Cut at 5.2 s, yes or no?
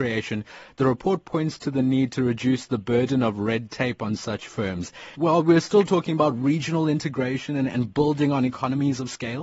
yes